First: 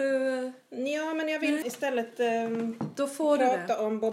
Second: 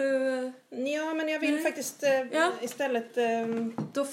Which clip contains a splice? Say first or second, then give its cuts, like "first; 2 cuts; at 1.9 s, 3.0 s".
first; 1 cut; at 1.6 s